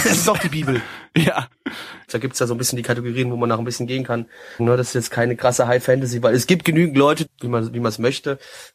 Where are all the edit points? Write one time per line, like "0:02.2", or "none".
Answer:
0:02.1
0:04.6
0:07.3